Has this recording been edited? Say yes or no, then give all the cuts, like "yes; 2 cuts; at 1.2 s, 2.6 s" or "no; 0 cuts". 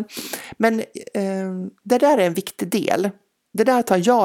no; 0 cuts